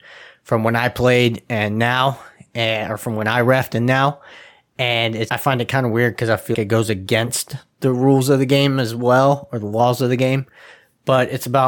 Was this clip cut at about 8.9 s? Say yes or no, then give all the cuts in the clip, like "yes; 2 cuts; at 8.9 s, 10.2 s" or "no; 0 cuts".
no; 2 cuts; at 5.3 s, 6.5 s